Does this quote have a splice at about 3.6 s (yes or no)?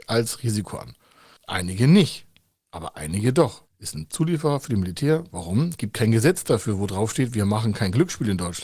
yes